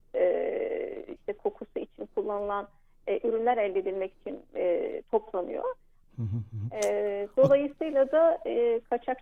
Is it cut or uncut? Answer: cut